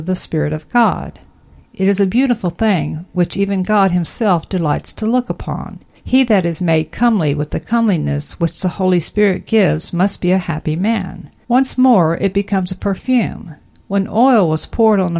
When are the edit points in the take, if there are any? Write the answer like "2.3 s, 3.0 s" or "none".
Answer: 6.0 s, 11.4 s